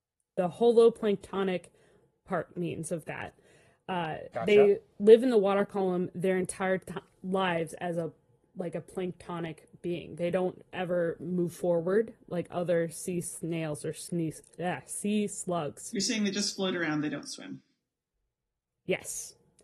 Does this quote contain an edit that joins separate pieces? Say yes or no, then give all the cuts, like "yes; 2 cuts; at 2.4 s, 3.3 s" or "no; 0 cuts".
no; 0 cuts